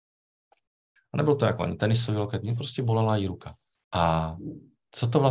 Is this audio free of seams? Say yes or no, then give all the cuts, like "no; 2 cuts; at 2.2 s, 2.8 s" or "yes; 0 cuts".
no; 2 cuts; at 1.0 s, 3.8 s